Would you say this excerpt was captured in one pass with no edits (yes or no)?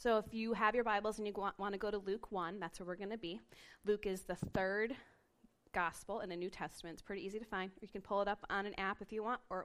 yes